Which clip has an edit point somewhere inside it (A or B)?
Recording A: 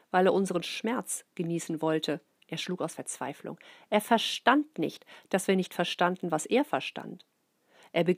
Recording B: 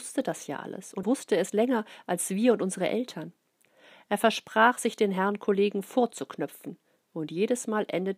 B